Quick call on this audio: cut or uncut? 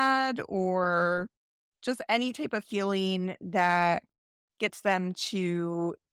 uncut